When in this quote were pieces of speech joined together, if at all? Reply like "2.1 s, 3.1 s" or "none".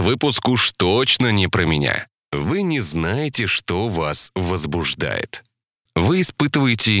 2.1 s

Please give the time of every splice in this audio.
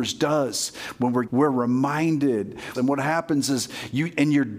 1.3 s, 2.7 s

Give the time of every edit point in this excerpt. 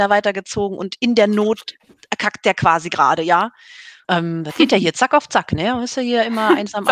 4.0 s

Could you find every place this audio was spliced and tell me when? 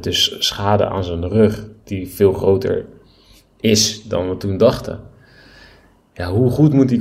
none

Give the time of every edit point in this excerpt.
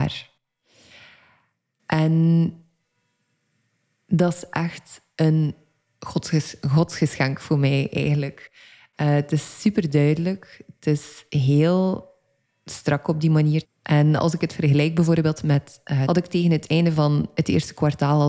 13.6 s, 16.0 s

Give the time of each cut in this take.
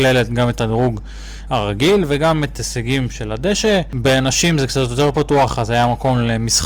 none

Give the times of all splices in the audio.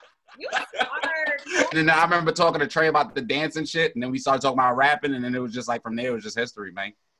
1.7 s

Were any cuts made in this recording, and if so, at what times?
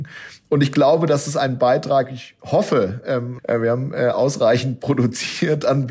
3.4 s

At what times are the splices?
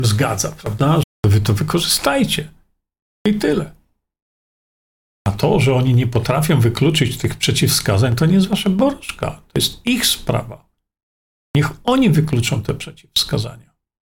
1.0 s

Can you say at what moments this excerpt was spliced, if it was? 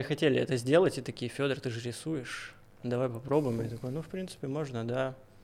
none

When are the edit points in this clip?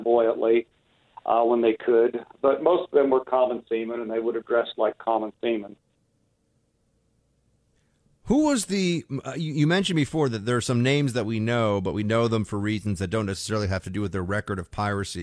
none

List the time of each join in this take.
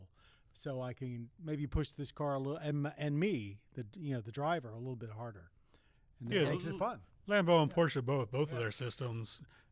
none

